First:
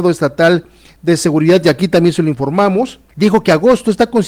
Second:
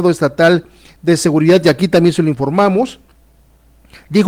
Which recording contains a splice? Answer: first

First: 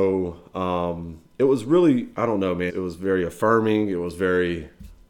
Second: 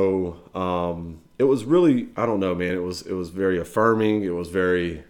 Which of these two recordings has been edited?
first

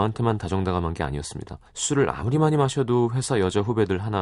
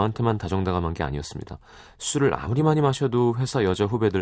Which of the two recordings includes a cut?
first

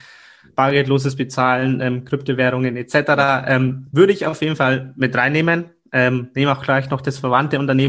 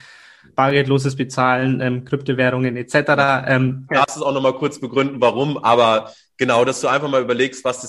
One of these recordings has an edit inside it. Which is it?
second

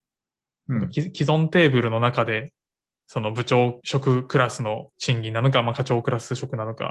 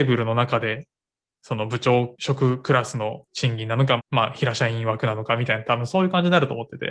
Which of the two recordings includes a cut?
second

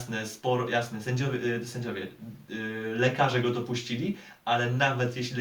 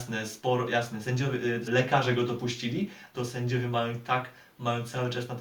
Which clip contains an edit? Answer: second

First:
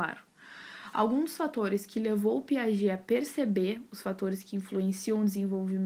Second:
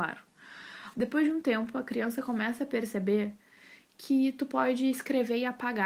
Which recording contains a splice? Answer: second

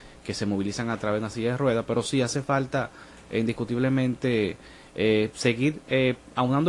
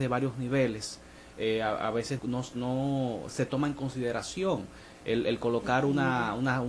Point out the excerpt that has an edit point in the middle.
second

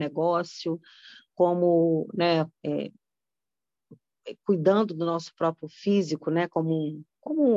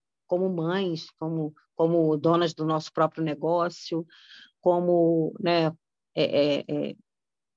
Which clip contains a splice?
first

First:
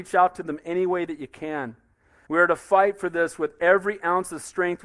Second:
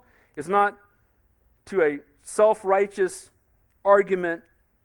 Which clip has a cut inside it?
first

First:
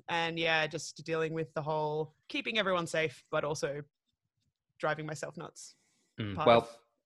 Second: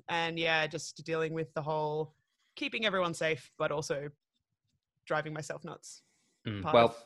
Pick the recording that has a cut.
first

